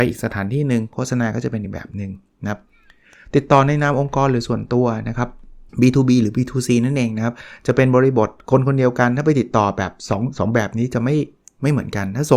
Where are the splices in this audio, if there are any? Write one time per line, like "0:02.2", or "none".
0:05.7